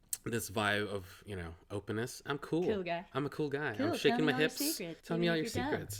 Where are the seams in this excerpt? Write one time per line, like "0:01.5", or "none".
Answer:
0:05.0